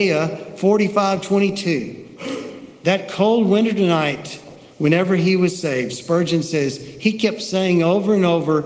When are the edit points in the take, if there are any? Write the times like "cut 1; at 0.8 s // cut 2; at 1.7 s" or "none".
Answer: none